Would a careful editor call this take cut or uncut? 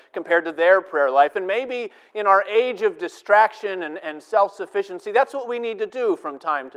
uncut